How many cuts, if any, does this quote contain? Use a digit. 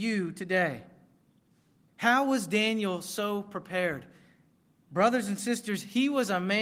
1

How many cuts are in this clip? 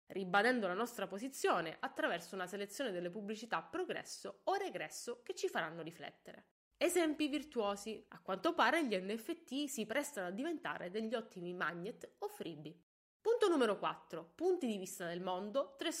1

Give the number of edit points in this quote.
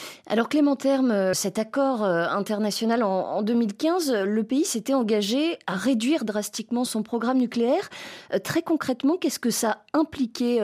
2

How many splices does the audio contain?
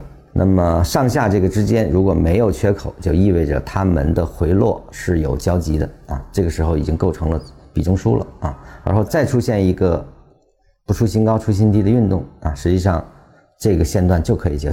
0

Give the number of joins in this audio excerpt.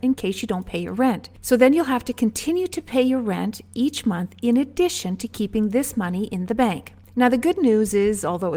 0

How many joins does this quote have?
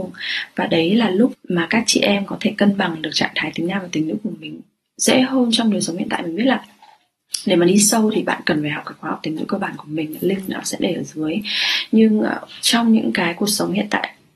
1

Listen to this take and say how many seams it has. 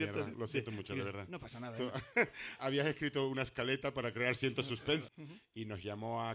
2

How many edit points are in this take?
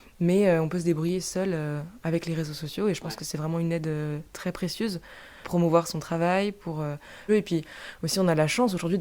2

